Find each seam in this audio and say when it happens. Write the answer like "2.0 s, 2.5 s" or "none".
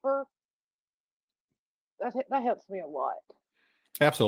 none